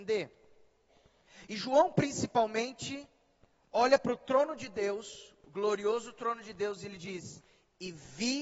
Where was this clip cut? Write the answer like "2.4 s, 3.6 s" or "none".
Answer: none